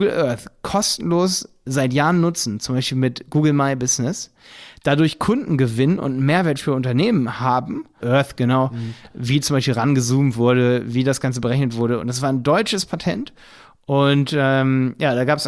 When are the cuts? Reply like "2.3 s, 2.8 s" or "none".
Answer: 8.0 s